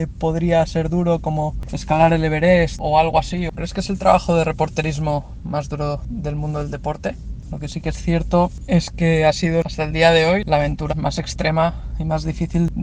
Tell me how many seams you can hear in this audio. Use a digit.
3